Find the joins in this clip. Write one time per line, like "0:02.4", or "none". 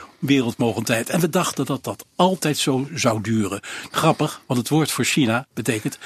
0:03.9

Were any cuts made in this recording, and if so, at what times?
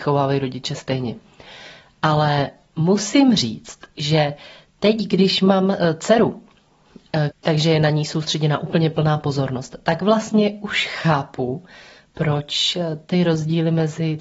0:07.3

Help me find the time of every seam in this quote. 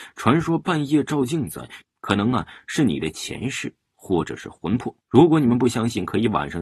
0:01.8
0:05.0

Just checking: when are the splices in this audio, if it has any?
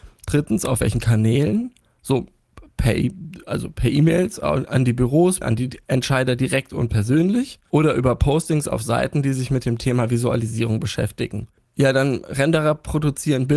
0:05.4

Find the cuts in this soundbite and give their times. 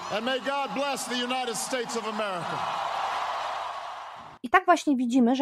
0:04.4

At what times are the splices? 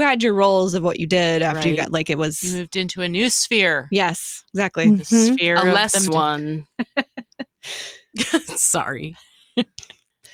0:06.1

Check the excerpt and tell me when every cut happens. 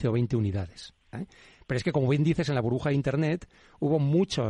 0:01.1

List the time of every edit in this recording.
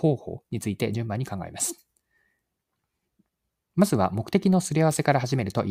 none

